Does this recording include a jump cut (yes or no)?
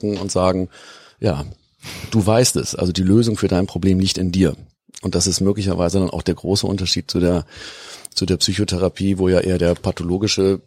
no